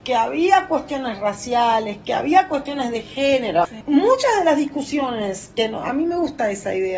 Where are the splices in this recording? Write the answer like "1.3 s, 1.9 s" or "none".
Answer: none